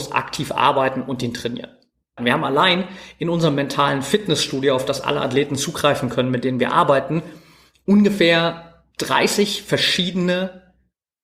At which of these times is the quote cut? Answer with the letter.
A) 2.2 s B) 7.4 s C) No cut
A